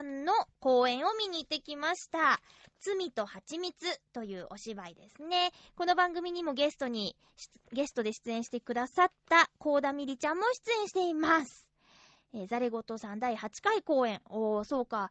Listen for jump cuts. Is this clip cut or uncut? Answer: uncut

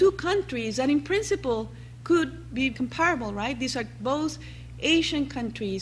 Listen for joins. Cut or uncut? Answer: cut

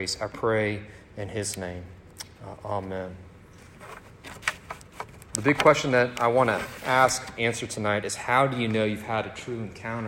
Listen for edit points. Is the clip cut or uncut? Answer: cut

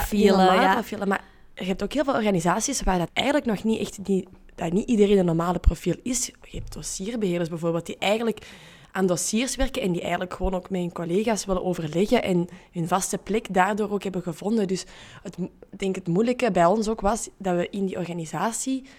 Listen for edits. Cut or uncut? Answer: cut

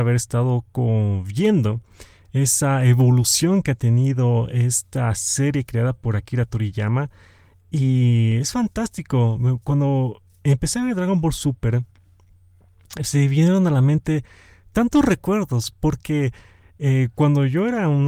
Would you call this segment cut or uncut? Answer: uncut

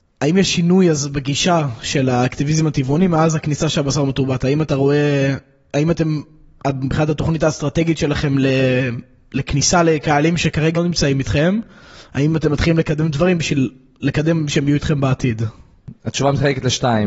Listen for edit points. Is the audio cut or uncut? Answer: cut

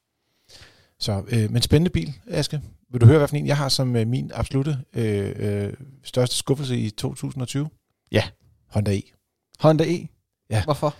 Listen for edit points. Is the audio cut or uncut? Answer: uncut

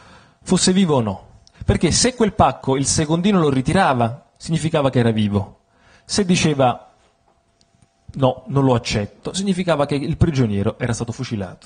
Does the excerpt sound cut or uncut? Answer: uncut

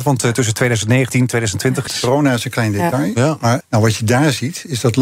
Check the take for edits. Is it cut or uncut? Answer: cut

